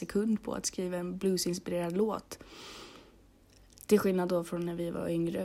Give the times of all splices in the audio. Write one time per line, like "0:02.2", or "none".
none